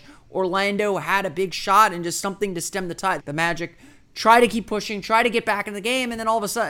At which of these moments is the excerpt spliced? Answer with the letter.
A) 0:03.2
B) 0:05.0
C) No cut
A